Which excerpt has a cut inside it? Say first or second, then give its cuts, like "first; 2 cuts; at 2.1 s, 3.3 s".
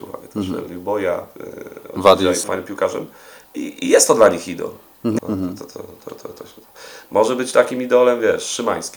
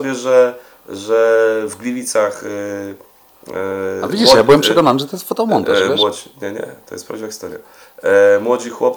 first; 2 cuts; at 2.4 s, 5.2 s